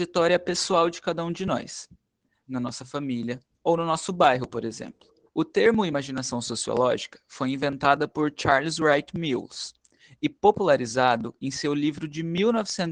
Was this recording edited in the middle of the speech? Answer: yes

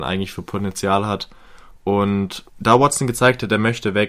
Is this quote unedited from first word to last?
no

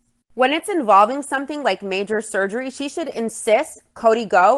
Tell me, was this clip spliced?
no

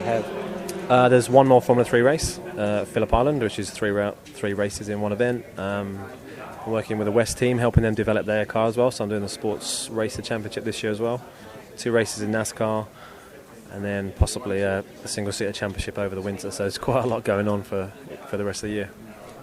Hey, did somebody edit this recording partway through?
no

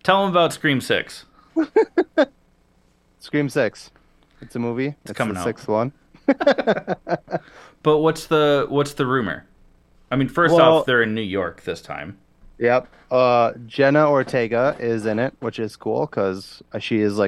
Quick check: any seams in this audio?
no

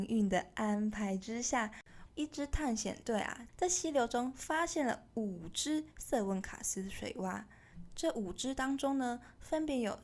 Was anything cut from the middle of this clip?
yes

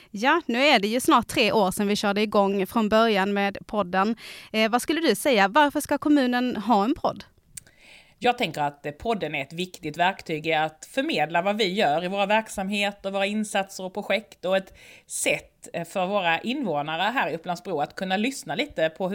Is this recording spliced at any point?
no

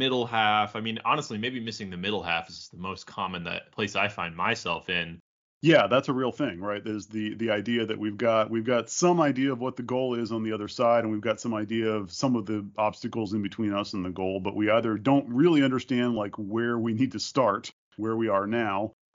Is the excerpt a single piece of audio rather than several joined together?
yes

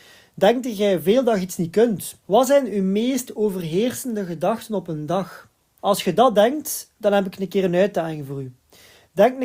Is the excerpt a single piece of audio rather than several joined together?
no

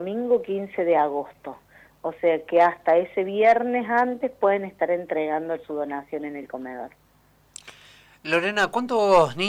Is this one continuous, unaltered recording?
yes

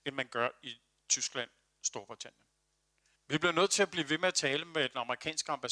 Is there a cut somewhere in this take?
yes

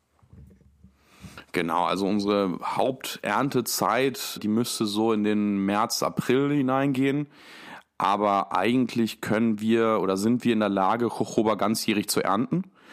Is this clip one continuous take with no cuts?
no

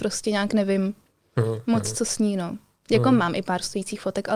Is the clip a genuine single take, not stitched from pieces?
yes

